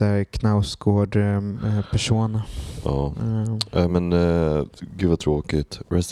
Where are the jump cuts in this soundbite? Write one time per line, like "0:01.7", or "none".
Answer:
none